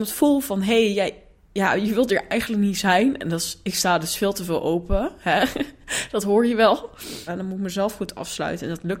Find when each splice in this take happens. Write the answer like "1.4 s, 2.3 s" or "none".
7.3 s